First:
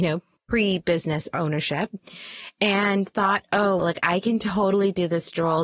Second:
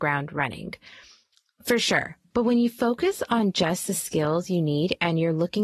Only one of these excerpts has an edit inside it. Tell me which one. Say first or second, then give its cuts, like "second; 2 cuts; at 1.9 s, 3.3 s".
first; 1 cut; at 3.8 s